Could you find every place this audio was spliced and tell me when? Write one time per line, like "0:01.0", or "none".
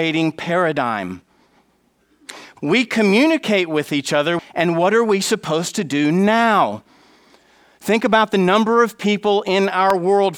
0:02.6
0:04.4

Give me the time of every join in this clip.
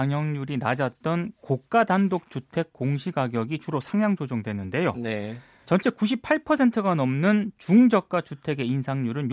0:05.6

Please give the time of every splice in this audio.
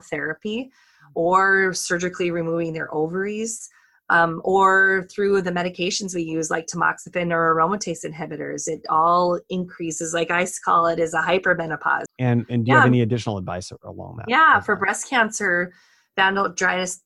0:12.1

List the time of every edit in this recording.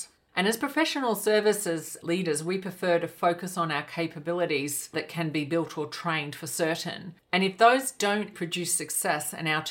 0:07.2
0:08.3

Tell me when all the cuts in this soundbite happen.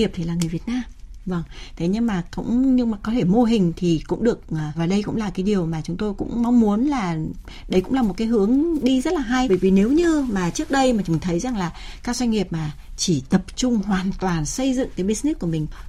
0:04.8
0:09.5

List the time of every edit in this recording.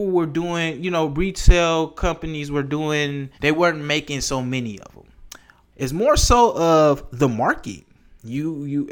0:03.4
0:05.7

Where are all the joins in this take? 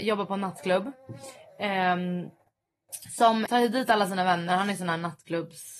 0:03.5

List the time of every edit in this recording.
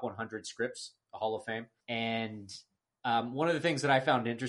0:01.8

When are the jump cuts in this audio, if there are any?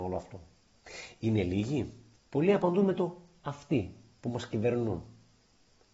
0:02.2

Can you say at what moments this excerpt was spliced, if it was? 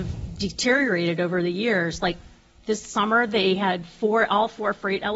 none

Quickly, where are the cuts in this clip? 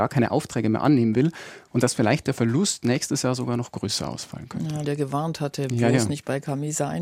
0:04.8

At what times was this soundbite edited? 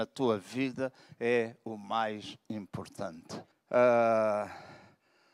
0:03.5

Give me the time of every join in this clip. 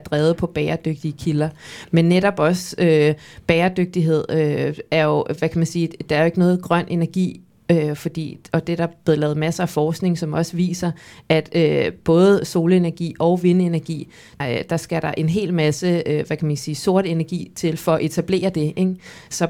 0:14.4

